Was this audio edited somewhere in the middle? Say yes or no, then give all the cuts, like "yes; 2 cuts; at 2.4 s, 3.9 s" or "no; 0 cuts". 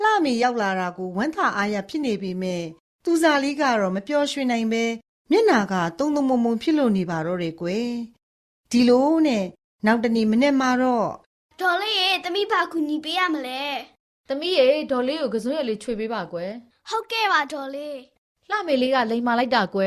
no; 0 cuts